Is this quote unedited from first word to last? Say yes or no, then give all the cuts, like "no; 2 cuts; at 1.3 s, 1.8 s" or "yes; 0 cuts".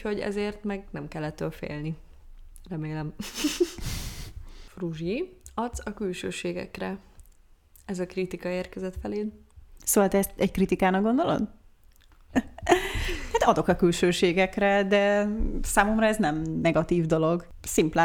no; 1 cut; at 12.3 s